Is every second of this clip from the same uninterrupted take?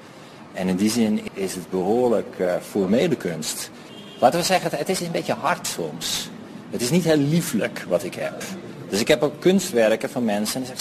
no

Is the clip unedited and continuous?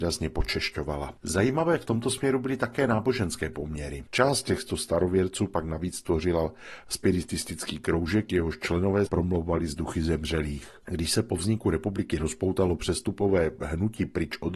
no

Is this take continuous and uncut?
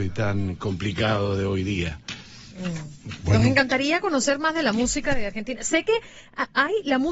yes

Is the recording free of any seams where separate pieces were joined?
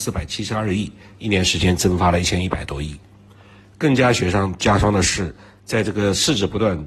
no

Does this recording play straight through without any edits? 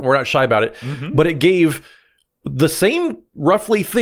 yes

